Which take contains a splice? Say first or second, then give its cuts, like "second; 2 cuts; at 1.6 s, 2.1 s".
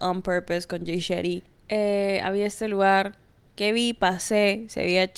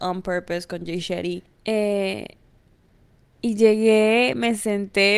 second; 1 cut; at 1.6 s